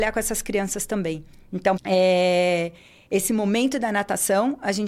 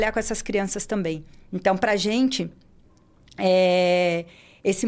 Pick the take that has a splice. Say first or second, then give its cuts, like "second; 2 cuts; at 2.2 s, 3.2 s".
first; 1 cut; at 1.8 s